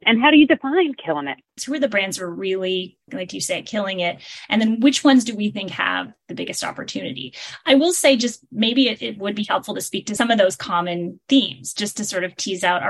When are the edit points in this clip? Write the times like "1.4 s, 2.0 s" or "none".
1.6 s